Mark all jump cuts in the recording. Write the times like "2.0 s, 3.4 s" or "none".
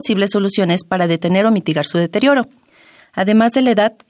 3.0 s